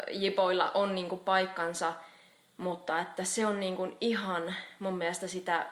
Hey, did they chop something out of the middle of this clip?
no; 0 cuts

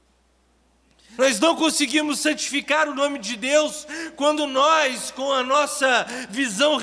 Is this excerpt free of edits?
no; 1 cut; at 1.2 s

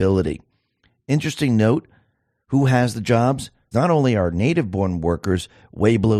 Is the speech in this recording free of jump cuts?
no; 1 cut; at 3.7 s

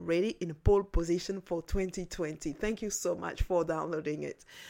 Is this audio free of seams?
yes; 0 cuts

